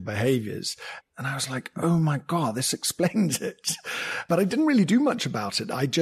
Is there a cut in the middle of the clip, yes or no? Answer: yes